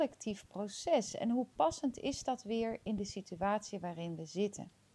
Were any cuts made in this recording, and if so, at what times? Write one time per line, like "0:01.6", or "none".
none

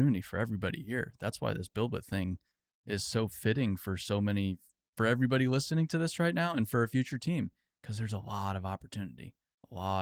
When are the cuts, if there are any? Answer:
none

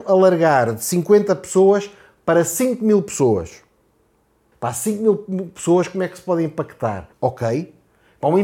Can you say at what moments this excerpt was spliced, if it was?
0:04.5
0:07.1

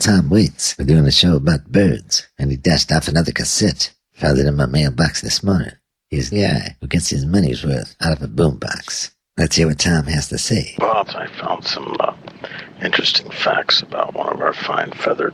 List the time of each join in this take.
0:06.3

